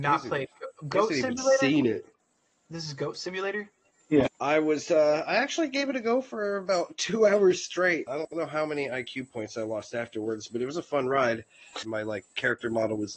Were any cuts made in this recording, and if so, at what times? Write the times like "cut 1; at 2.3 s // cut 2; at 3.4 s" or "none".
cut 1; at 4.3 s // cut 2; at 8.1 s // cut 3; at 11.8 s